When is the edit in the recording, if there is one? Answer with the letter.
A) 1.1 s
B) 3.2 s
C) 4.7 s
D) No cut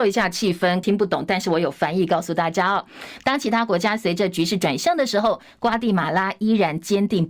B